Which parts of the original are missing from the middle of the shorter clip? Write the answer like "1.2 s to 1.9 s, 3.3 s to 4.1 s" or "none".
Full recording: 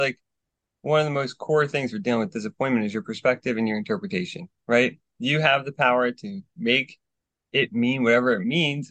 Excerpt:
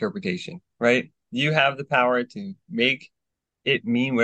none

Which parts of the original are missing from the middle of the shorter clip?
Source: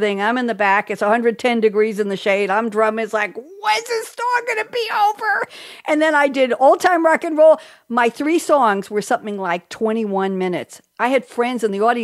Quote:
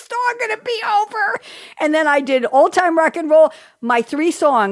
none

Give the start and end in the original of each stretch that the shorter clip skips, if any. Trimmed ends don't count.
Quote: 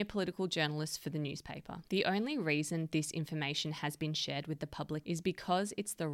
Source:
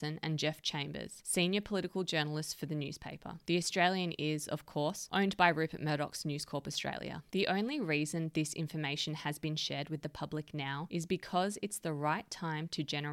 3.4 s to 7.3 s, 10.5 s to 10.9 s

